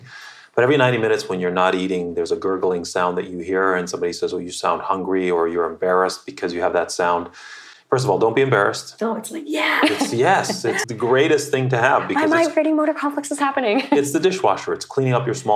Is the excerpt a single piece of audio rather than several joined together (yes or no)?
no